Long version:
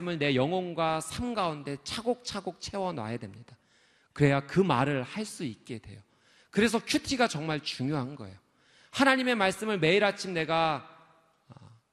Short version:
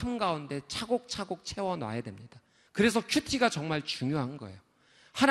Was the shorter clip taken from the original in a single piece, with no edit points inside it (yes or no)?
no